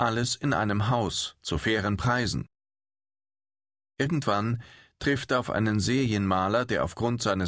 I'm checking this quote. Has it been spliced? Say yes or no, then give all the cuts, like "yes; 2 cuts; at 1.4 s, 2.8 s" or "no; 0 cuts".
no; 0 cuts